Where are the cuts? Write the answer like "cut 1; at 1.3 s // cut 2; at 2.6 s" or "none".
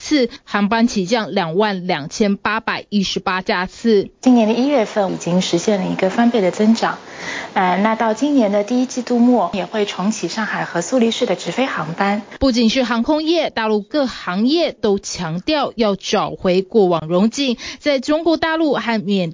cut 1; at 5.1 s